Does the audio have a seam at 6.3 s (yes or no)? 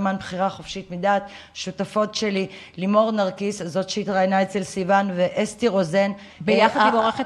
yes